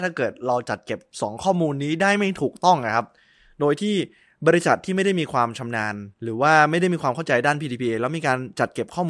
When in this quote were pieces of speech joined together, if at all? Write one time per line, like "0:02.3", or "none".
0:06.1